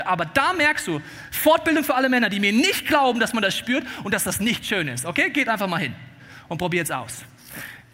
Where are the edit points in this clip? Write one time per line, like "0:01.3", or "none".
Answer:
none

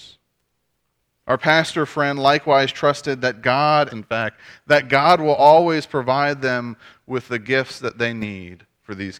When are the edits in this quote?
0:03.9

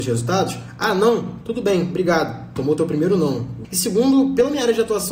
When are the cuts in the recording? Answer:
0:03.6

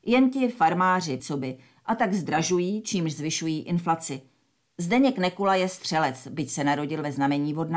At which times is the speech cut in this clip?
0:01.2
0:04.7

